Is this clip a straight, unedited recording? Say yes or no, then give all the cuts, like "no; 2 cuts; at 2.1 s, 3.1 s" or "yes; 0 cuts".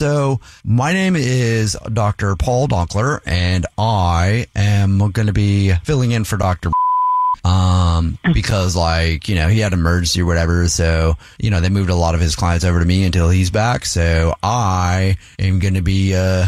yes; 0 cuts